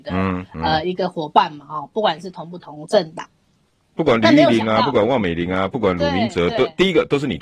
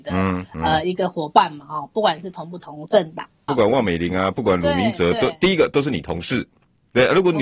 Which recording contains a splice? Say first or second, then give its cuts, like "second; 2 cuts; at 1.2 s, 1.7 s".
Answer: second; 1 cut; at 3.5 s